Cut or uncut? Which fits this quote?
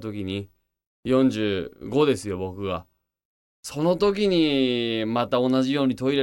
uncut